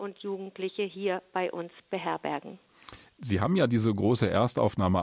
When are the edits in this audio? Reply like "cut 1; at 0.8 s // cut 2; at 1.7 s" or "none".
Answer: none